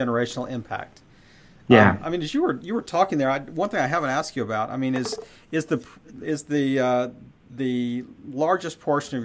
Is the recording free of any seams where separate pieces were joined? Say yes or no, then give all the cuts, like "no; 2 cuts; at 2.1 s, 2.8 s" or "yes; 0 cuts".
yes; 0 cuts